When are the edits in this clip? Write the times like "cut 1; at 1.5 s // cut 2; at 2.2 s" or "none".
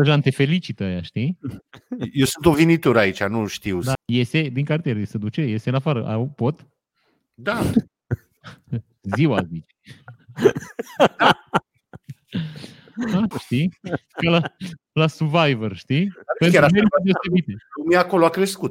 cut 1; at 3.9 s // cut 2; at 13.3 s